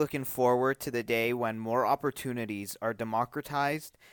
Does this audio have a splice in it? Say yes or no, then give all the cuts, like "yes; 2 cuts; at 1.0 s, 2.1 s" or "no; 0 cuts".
no; 0 cuts